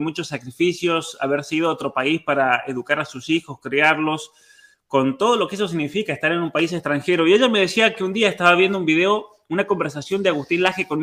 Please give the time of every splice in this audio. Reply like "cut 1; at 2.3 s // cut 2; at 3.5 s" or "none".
none